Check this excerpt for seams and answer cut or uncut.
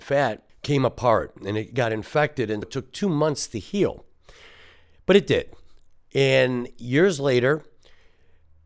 cut